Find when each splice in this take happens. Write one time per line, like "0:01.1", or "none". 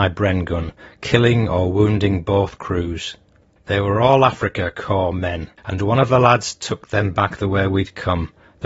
0:03.6
0:05.6